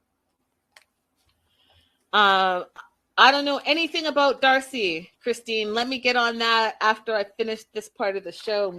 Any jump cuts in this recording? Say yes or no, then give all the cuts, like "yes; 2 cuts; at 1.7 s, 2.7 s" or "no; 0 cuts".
no; 0 cuts